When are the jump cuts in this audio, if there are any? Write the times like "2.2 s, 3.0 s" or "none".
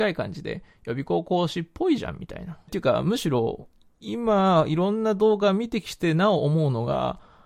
2.7 s